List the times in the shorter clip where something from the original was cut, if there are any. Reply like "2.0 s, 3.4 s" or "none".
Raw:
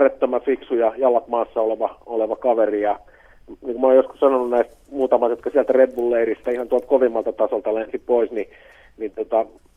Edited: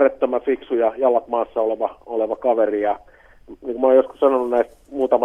none